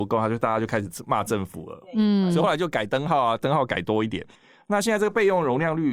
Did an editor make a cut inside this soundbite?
no; 0 cuts

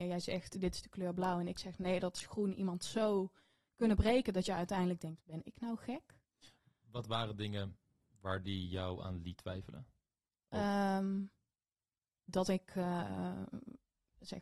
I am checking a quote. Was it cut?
yes; 1 cut; at 12.3 s

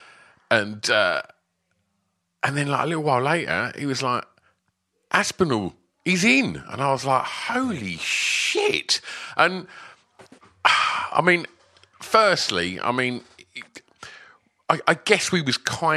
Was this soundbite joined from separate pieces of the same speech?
no; 0 cuts

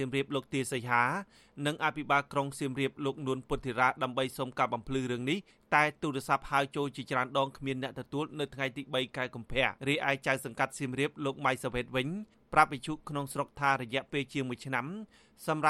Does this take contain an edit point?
yes; 1 cut; at 9.8 s

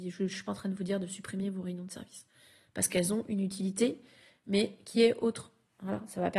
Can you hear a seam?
no; 0 cuts

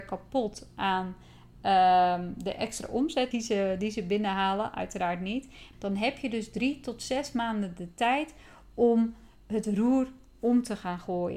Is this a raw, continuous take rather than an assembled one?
no; 2 cuts; at 3.3 s, 5.7 s

